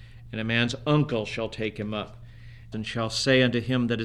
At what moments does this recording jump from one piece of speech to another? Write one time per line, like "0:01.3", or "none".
0:02.7